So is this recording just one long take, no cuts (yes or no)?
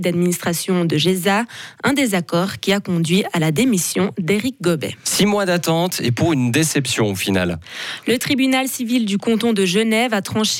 yes